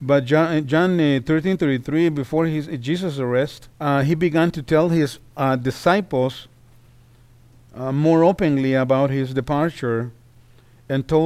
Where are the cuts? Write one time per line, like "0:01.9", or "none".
0:03.7